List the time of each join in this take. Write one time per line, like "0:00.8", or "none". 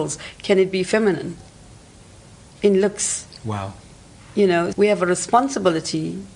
0:04.7